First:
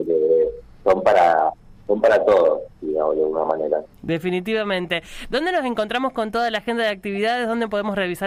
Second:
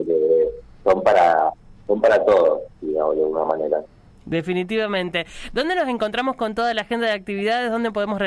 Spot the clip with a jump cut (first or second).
first